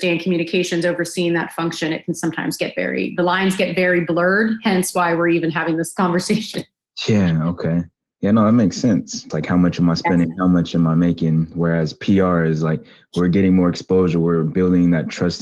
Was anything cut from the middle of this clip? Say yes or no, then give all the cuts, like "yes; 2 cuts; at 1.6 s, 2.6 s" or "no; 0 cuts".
yes; 1 cut; at 9.3 s